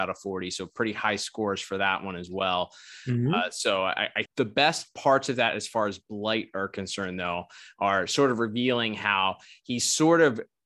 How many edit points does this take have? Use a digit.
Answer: 1